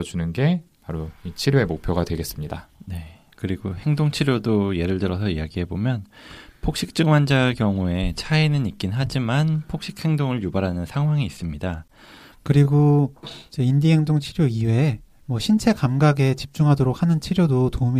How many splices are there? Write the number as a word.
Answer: two